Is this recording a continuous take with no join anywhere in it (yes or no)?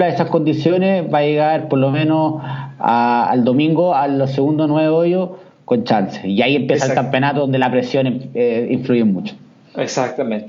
yes